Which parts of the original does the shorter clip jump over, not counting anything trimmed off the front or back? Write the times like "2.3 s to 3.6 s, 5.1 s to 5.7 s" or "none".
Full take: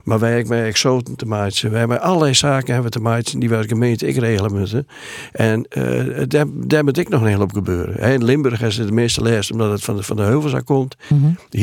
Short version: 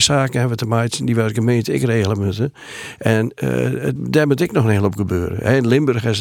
6.3 s to 6.5 s